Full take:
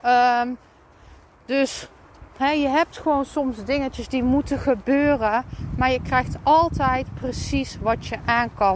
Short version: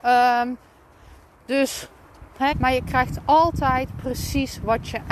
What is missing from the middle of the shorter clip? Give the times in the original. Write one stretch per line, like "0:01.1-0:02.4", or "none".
0:02.5-0:05.7